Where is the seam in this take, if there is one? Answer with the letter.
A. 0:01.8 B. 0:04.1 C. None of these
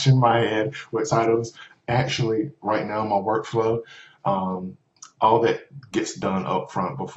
C